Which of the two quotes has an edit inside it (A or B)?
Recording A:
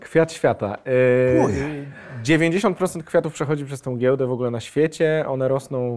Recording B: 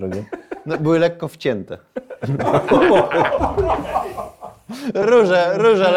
B